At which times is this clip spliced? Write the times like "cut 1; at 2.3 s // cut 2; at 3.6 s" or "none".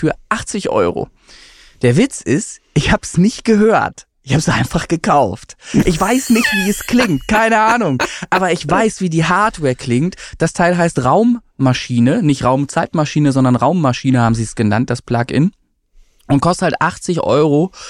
none